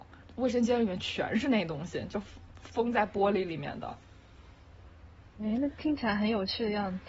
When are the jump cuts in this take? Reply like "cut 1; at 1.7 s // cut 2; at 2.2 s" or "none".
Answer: none